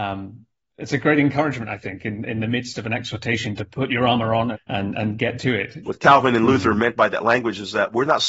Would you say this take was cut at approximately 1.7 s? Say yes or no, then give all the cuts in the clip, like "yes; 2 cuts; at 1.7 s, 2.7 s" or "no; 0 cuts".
no; 2 cuts; at 4.5 s, 5.8 s